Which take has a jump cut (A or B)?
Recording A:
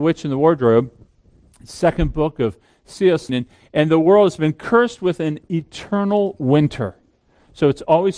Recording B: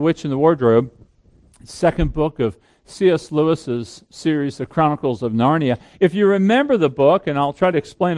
A